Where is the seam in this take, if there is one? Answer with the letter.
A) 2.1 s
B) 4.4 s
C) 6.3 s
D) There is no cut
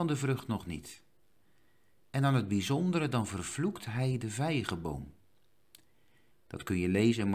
C